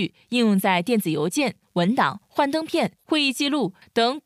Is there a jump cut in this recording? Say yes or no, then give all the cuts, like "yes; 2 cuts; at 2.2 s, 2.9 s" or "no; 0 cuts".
yes; 1 cut; at 3.0 s